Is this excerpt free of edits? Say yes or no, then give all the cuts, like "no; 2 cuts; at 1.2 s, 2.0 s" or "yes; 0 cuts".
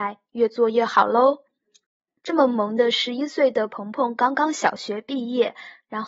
no; 1 cut; at 2.2 s